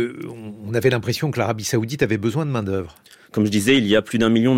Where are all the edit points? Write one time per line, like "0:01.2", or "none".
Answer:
0:03.2